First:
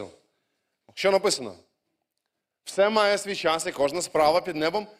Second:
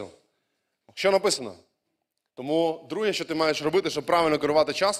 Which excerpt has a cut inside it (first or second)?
second